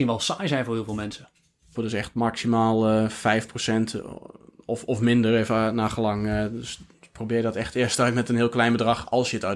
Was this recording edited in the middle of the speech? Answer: yes; 1 cut; at 1.7 s

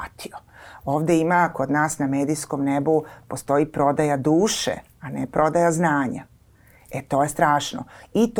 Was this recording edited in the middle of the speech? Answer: no; 0 cuts

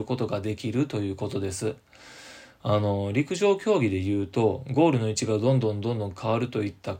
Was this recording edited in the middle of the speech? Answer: no; 0 cuts

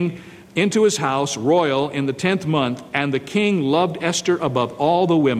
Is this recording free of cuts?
yes; 0 cuts

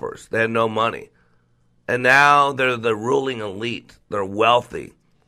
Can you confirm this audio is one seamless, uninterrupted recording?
yes; 0 cuts

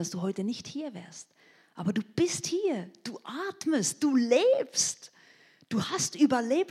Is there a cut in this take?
no; 0 cuts

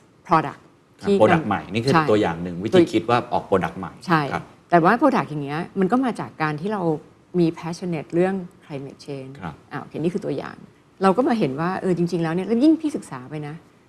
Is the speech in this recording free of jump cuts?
yes; 0 cuts

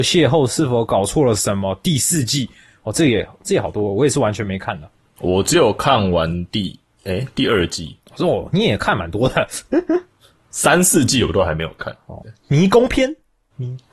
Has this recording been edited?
yes; 1 cut; at 12.2 s

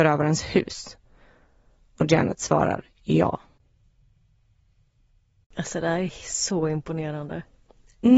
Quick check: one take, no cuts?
yes; 0 cuts

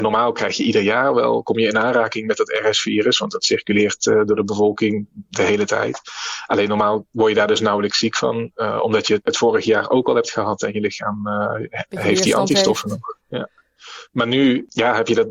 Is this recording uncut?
yes; 0 cuts

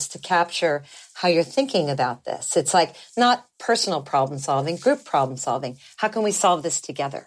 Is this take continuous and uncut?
yes; 0 cuts

